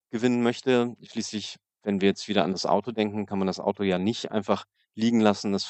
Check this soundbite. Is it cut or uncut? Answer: uncut